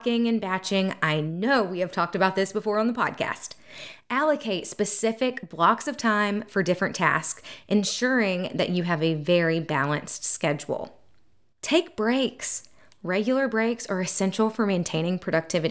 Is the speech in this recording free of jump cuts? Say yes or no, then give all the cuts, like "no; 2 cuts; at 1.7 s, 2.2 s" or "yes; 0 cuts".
yes; 0 cuts